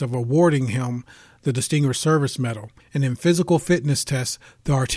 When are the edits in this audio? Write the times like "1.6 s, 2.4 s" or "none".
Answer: 2.8 s